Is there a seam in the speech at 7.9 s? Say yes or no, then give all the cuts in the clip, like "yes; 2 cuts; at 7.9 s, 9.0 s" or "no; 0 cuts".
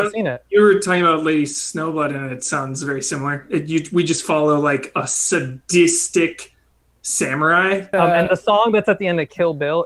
yes; 1 cut; at 7.9 s